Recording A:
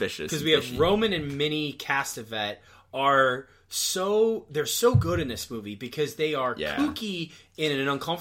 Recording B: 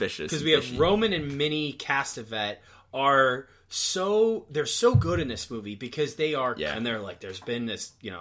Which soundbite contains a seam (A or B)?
B